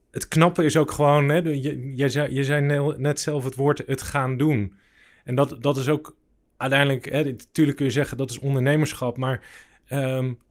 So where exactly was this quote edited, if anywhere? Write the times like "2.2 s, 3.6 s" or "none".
none